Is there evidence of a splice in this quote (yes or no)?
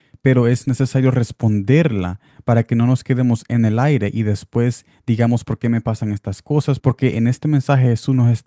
yes